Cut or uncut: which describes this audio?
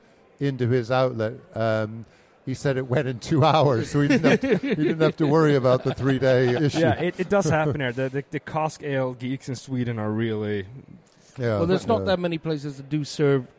cut